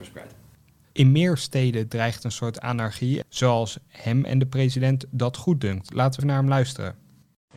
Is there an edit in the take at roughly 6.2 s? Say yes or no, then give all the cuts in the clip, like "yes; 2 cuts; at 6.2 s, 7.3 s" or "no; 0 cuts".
yes; 3 cuts; at 0.9 s, 3.2 s, 6.2 s